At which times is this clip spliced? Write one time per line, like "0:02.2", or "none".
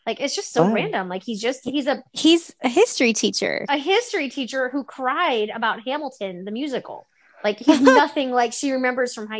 none

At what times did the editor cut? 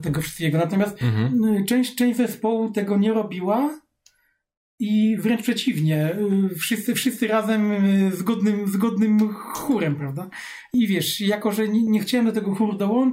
0:10.7
0:11.9

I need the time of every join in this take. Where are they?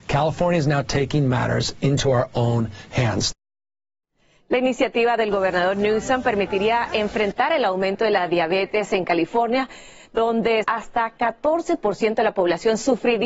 0:10.6

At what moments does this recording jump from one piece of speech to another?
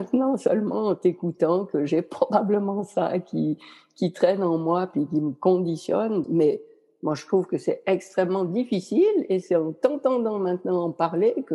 0:06.2

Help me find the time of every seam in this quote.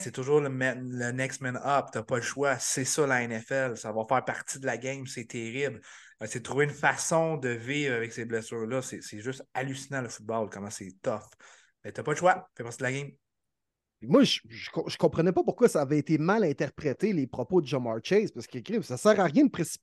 0:06.1

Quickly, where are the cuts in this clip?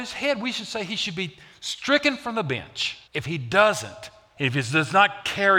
0:03.1
0:04.4

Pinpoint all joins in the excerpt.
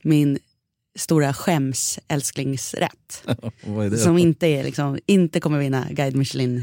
none

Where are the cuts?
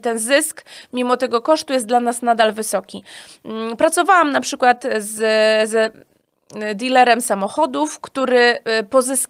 none

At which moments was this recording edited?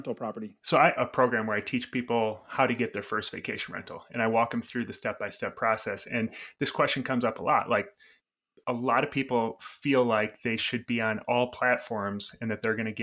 0:01.0

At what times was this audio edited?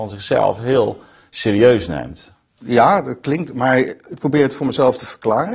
0:02.5

